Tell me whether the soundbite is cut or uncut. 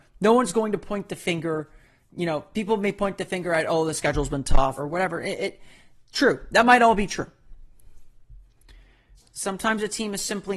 cut